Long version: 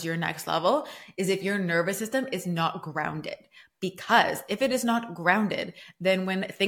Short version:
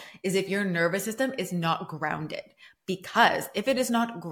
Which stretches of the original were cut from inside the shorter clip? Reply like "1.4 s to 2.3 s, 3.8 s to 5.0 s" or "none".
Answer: none